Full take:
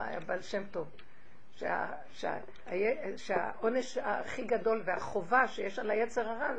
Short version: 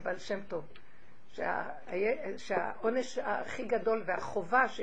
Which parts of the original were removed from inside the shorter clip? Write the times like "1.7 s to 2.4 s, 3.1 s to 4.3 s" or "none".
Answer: 2.1 s to 2.6 s